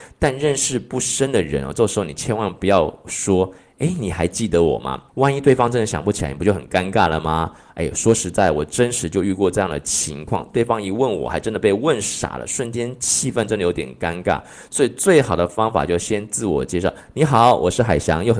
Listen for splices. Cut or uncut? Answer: uncut